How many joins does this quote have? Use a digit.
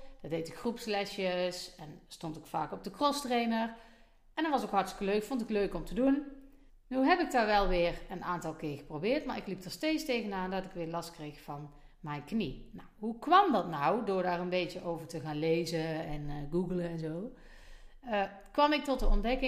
1